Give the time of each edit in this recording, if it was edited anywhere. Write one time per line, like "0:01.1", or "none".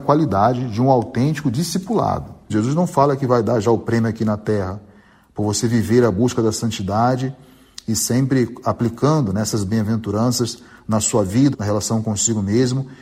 0:02.5
0:11.5